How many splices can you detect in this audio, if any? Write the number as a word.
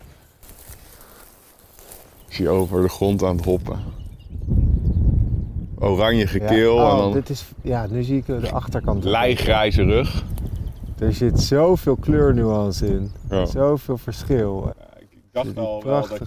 one